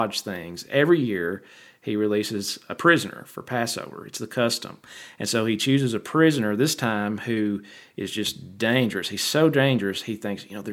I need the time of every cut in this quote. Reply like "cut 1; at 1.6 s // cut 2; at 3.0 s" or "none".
none